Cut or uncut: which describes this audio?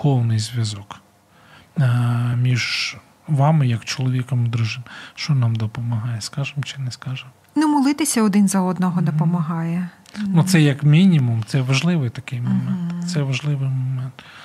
uncut